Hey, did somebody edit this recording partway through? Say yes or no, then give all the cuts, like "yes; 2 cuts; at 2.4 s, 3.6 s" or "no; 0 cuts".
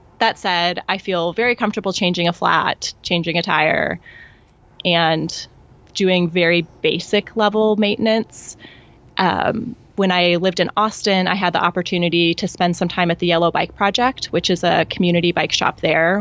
no; 0 cuts